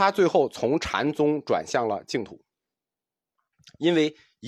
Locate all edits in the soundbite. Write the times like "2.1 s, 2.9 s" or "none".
none